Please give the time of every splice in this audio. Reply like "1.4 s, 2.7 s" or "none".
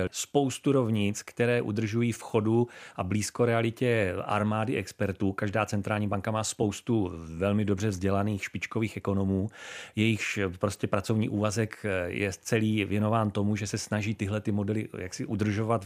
none